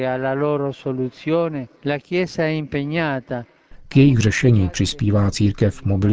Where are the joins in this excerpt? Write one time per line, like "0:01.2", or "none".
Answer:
0:01.8